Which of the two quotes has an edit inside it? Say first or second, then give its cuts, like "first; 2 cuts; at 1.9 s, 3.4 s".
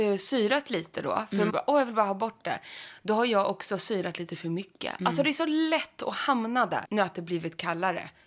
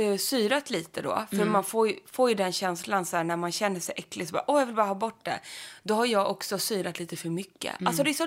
first; 2 cuts; at 1.5 s, 6.8 s